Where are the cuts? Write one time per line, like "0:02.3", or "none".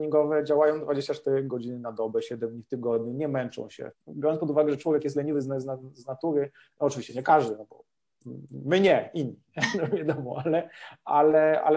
0:03.9